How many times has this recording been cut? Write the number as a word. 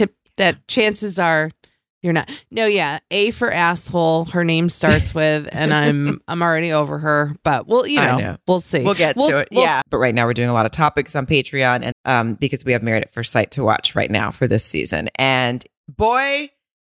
two